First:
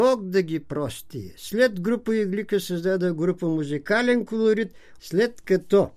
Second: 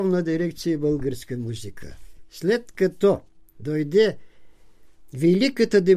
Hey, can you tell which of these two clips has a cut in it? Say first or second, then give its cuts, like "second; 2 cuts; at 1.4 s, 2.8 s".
first; 1 cut; at 5.0 s